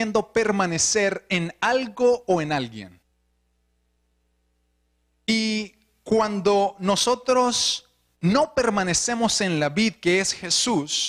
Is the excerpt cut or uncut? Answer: uncut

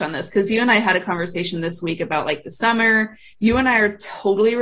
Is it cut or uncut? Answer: cut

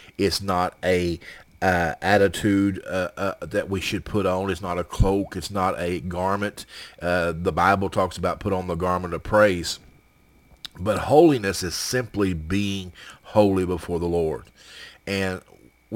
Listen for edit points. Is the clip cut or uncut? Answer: uncut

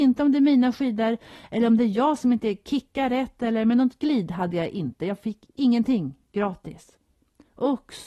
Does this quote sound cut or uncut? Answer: uncut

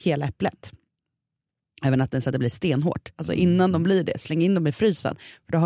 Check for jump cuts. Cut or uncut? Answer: cut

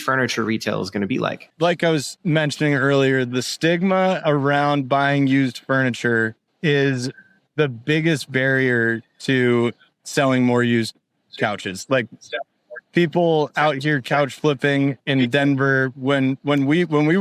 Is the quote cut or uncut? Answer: uncut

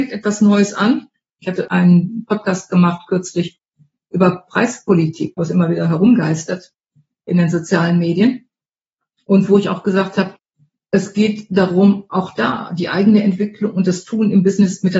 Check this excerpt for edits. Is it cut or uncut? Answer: cut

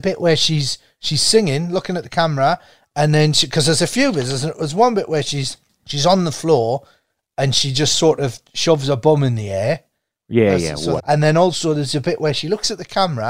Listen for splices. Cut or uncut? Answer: cut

